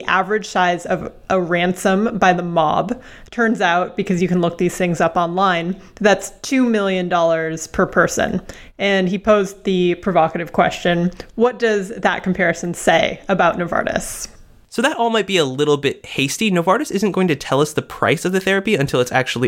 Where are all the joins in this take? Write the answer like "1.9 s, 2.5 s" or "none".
none